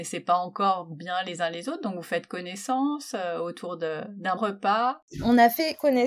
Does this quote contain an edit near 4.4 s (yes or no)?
yes